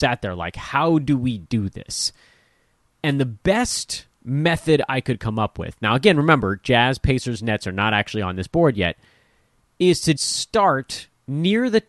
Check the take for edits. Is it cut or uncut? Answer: cut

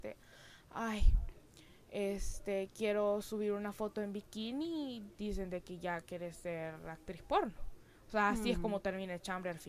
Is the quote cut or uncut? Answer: uncut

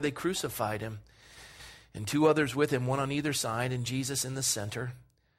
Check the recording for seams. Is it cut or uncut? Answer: uncut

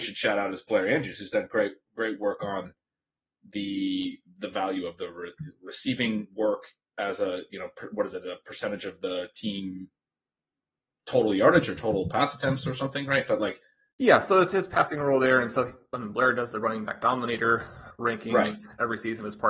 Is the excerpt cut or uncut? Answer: uncut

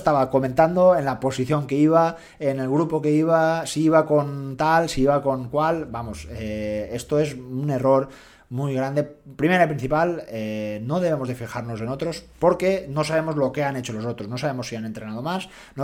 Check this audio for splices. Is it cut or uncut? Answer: uncut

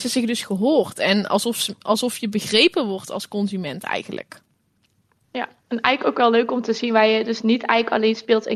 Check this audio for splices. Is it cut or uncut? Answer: uncut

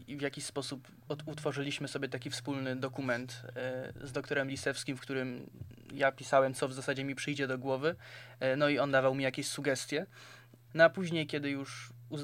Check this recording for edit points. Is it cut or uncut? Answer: cut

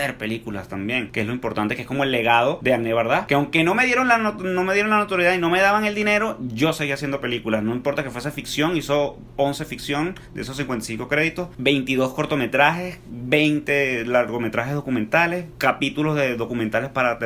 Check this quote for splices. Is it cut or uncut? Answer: uncut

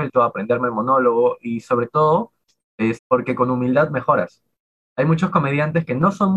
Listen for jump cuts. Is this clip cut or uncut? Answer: cut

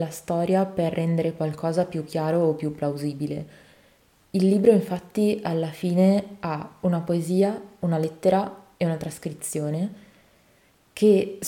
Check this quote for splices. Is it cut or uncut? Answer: uncut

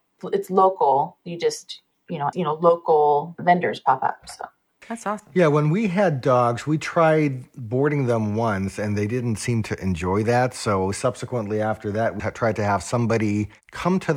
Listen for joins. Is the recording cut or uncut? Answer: cut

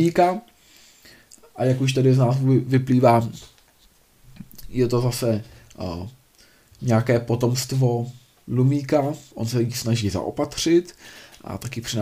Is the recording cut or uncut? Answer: uncut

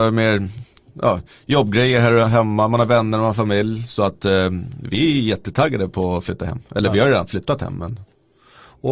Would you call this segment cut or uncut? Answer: uncut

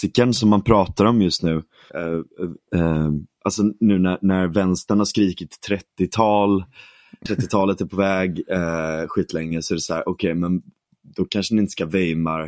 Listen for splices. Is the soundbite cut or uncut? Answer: cut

